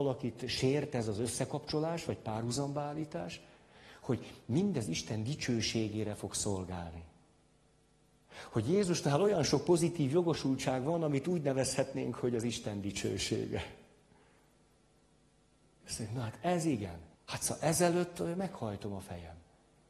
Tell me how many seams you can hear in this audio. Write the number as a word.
one